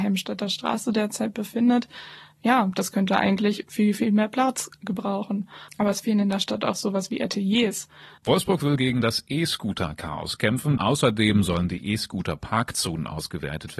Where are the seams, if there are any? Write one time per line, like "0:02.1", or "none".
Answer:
0:08.2
0:10.8